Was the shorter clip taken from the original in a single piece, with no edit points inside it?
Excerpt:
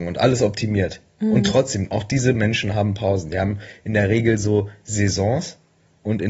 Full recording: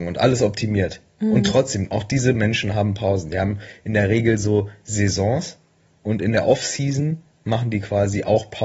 yes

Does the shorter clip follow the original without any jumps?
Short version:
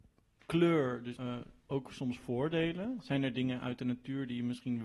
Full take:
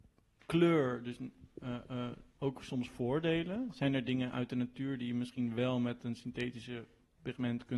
no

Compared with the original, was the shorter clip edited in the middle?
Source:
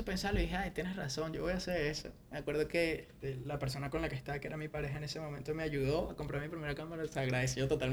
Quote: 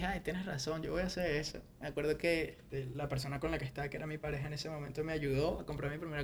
no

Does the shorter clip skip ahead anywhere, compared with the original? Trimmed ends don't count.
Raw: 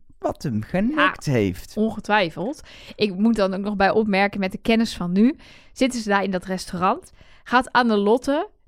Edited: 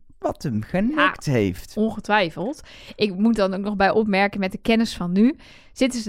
no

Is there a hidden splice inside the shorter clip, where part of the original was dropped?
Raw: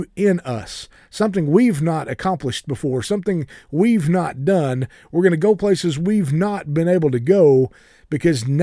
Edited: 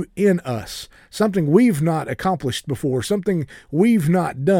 no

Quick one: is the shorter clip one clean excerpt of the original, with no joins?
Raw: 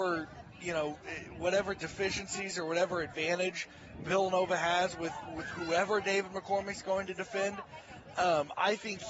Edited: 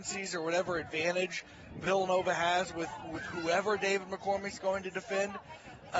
yes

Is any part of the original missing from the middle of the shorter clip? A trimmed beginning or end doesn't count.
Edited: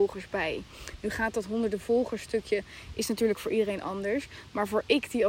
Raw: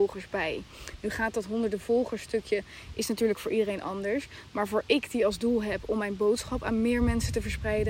no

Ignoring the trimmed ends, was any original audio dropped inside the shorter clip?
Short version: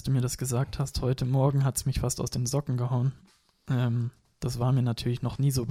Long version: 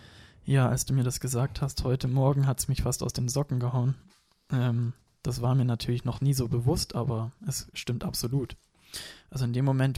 no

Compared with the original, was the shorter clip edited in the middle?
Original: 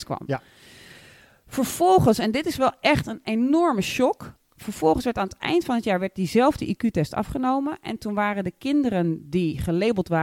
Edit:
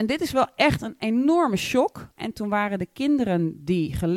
yes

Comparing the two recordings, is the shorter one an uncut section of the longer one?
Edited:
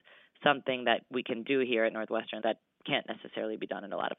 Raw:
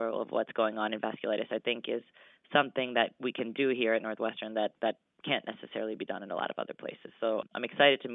no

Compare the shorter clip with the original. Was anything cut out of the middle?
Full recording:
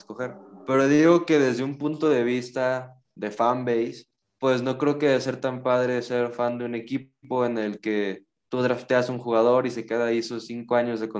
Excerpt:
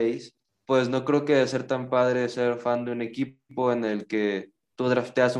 no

